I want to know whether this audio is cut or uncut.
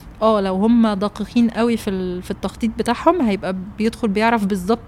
uncut